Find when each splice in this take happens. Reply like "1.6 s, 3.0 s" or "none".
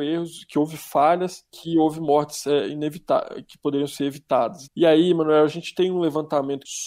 4.7 s